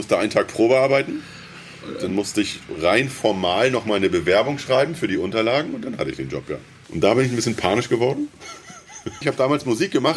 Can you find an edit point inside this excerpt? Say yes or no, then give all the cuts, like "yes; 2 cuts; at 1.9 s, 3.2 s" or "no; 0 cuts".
yes; 2 cuts; at 6.8 s, 9.2 s